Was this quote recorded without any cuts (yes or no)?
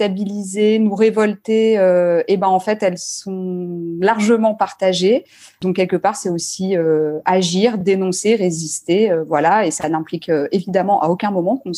yes